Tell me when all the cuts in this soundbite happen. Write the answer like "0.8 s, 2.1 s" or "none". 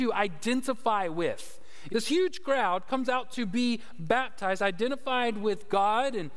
1.9 s

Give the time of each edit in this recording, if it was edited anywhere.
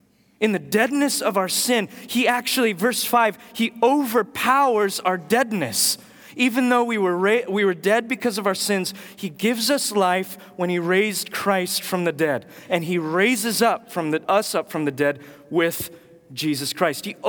14.2 s

